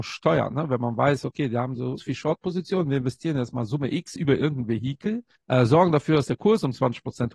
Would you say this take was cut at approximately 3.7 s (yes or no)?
no